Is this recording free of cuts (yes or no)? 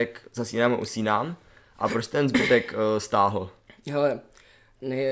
yes